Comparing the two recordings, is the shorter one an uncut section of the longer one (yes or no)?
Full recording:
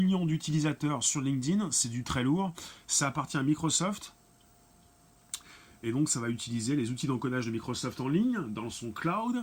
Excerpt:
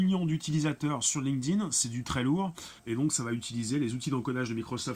no